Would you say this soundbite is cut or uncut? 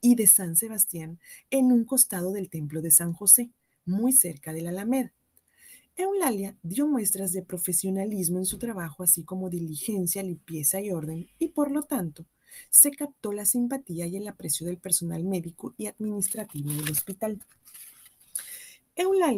uncut